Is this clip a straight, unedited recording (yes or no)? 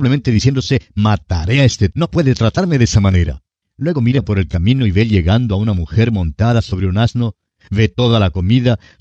no